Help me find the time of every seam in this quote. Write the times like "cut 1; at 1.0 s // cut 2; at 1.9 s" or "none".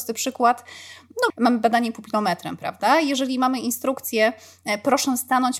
cut 1; at 1.3 s